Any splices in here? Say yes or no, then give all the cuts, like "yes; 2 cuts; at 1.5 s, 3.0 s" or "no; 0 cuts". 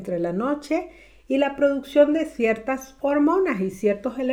no; 0 cuts